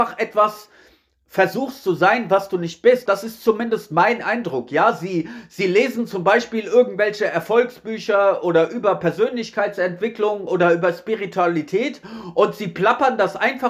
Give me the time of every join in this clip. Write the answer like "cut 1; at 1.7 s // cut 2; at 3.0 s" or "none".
cut 1; at 3.1 s

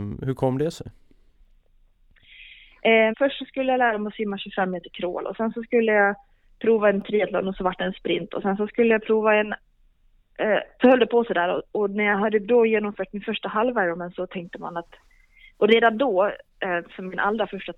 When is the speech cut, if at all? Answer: cut 1; at 3.1 s // cut 2; at 10.8 s

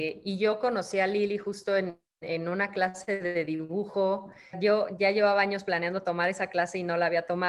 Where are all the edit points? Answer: cut 1; at 4.5 s

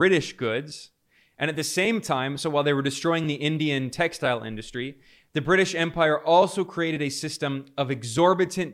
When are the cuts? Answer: none

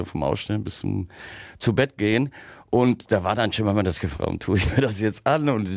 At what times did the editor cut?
cut 1; at 4.2 s

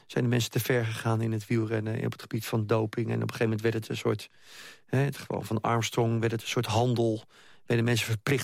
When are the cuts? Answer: none

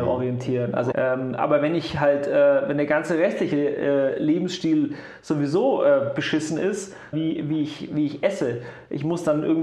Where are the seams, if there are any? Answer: cut 1; at 0.9 s // cut 2; at 7.1 s

